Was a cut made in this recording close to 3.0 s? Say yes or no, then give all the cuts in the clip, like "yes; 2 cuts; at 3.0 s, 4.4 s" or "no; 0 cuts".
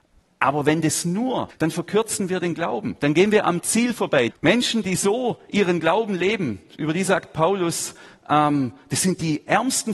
no; 2 cuts; at 1.5 s, 4.3 s